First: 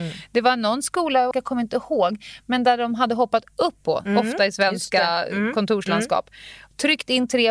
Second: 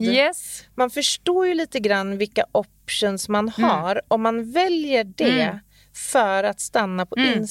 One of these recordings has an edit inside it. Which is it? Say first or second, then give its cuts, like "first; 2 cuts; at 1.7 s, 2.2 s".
first; 2 cuts; at 1.3 s, 3.8 s